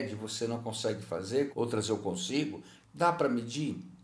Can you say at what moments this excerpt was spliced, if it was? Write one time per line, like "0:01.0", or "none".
0:01.5
0:02.8